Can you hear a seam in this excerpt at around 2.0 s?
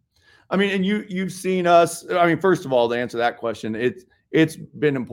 no; 0 cuts

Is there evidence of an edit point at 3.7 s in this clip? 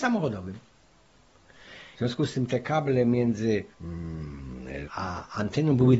yes; 3 cuts; at 1.9 s, 3.7 s, 4.8 s

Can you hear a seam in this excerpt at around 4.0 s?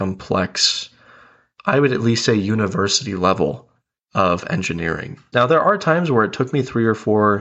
no; 1 cut; at 5.3 s

